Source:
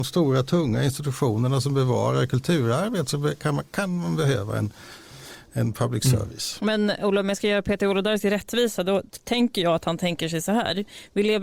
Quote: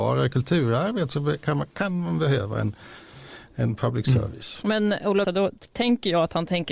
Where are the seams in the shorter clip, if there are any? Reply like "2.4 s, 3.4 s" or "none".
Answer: 5.2 s